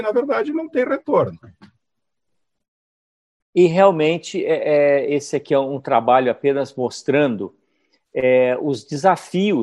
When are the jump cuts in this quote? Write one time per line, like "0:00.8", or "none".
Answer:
0:03.4